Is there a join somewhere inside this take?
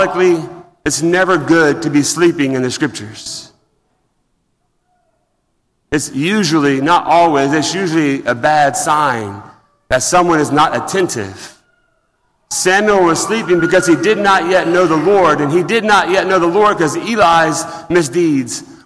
no; 0 cuts

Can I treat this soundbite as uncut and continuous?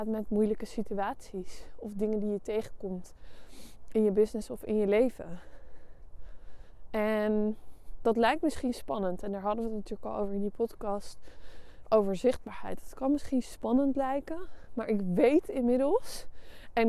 yes; 0 cuts

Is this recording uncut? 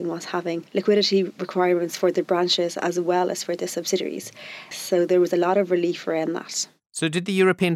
no; 1 cut; at 4.7 s

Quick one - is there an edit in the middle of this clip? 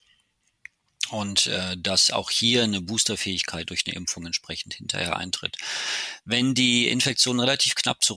no; 0 cuts

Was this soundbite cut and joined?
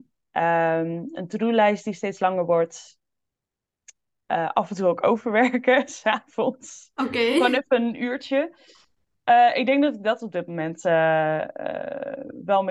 no; 0 cuts

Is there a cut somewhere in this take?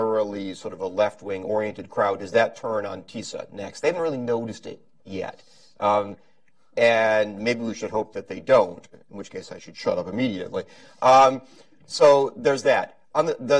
no; 0 cuts

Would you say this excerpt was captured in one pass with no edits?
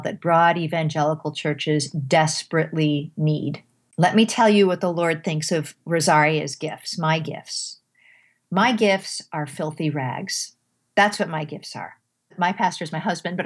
yes; 0 cuts

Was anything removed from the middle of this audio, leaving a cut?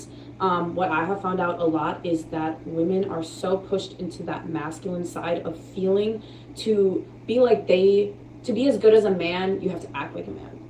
no; 0 cuts

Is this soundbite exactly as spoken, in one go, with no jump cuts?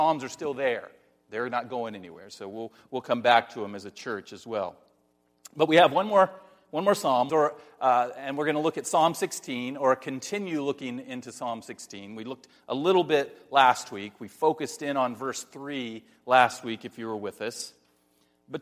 no; 1 cut; at 7.3 s

